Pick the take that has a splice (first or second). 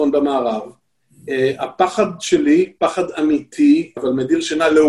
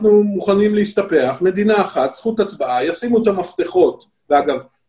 first